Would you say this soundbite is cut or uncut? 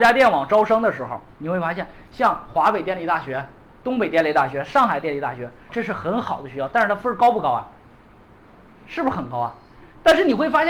cut